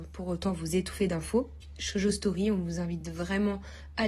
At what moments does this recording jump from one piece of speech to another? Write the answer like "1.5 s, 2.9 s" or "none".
none